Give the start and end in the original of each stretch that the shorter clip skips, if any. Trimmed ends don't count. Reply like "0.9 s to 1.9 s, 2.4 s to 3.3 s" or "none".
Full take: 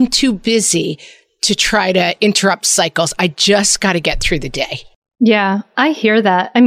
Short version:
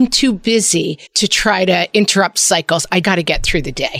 1.1 s to 1.3 s, 3.3 s to 3.8 s

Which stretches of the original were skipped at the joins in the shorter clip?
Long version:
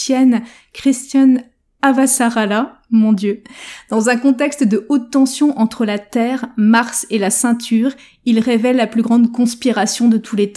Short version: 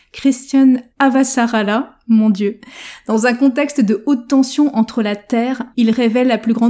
1.5 s to 1.7 s, 6.5 s to 8.2 s

